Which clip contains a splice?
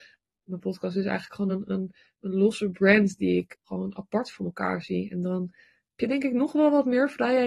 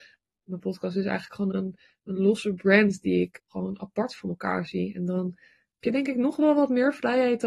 second; 1 cut; at 1.5 s

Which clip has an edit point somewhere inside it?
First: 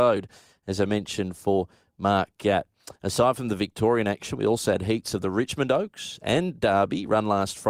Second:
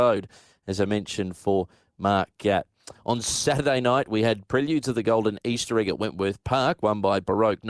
second; 1 cut; at 3.0 s

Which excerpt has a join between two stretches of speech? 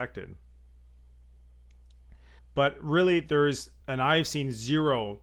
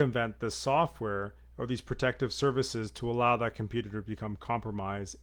first; 2 cuts; at 2.4 s, 3.8 s

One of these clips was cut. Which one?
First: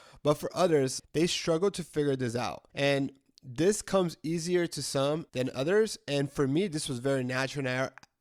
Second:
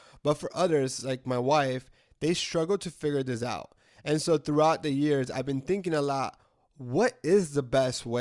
first; 3 cuts; at 1.0 s, 2.7 s, 5.3 s

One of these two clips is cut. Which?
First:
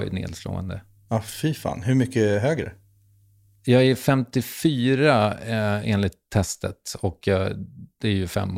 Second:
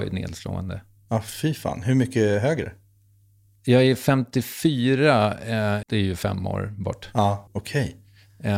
second; 2 cuts; at 5.8 s, 7.5 s

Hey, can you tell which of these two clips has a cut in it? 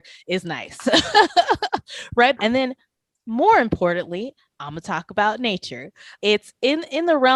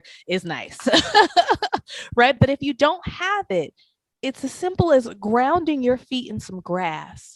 first; 2 cuts; at 2.4 s, 6.2 s

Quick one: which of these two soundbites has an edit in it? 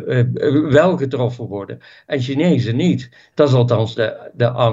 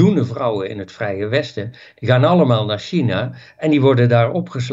first; 1 cut; at 3.3 s

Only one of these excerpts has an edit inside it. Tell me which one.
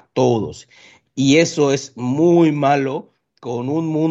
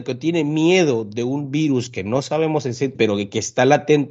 second; 1 cut; at 2.9 s

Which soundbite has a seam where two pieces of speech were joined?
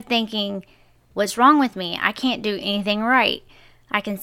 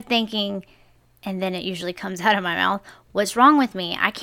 first; 1 cut; at 1.1 s

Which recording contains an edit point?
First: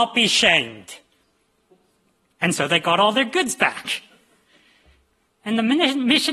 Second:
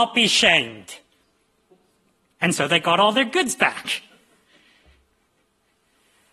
first; 1 cut; at 5.3 s

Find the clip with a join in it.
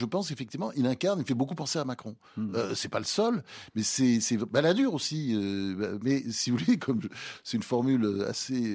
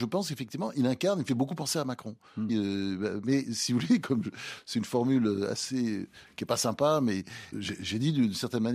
second; 2 cuts; at 2.5 s, 7.5 s

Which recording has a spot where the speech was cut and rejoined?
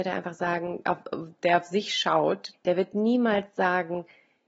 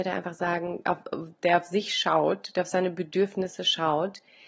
first; 1 cut; at 2.5 s

